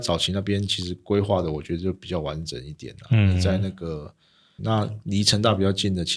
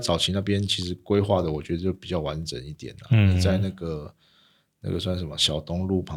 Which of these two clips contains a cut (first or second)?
first